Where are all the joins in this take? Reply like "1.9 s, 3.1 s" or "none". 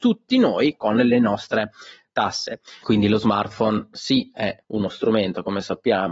2.8 s, 4.6 s